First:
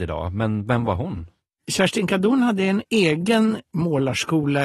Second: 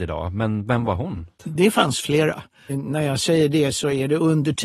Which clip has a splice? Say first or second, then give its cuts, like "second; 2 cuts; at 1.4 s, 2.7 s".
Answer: second; 2 cuts; at 1.4 s, 2.7 s